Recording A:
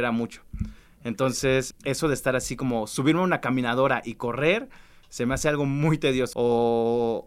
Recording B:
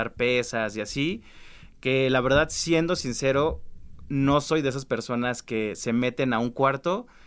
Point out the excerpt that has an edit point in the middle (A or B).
A